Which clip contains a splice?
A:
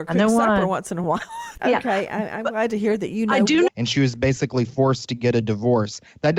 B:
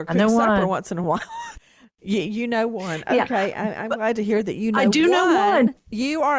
A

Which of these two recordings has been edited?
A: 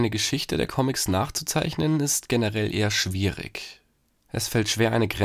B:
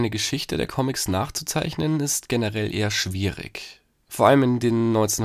B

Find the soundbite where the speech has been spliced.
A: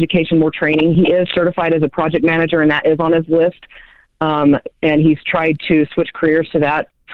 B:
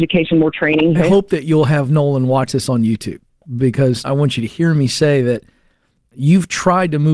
B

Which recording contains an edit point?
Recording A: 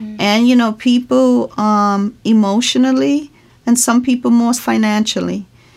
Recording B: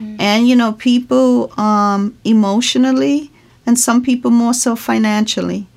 A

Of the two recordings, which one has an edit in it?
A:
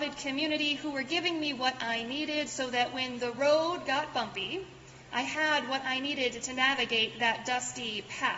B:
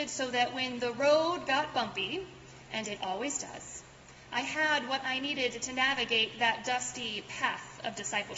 A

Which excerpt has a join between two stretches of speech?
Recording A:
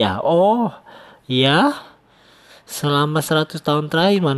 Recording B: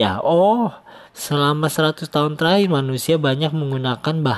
B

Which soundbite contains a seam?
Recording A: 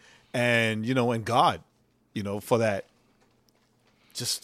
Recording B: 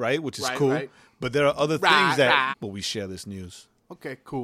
B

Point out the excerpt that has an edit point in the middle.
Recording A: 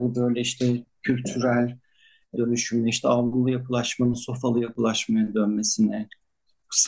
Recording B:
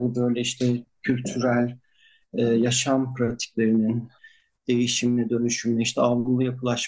A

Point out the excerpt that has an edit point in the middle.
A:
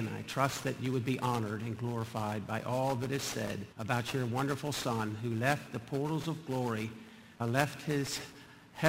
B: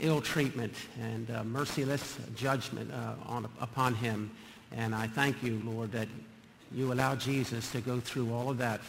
A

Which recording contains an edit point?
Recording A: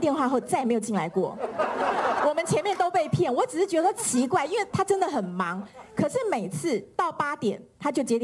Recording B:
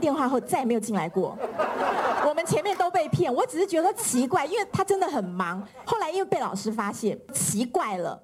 B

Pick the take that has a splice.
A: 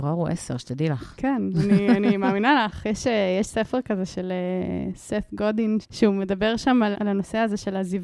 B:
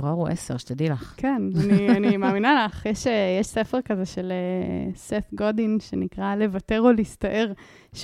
A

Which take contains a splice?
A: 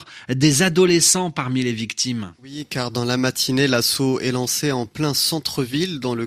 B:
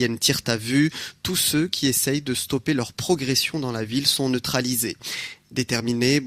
A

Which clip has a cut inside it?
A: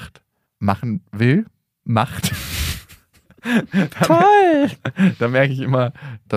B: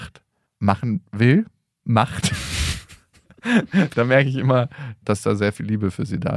B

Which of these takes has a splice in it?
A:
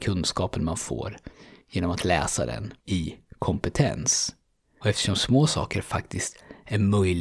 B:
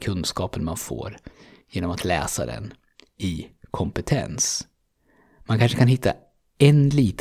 A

